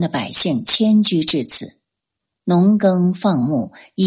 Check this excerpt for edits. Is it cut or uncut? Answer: uncut